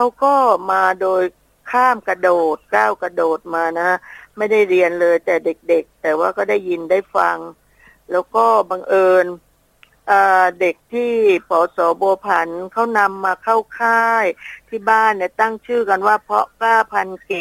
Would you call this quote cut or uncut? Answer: uncut